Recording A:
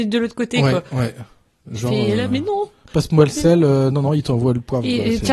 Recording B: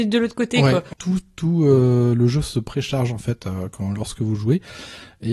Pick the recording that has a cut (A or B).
B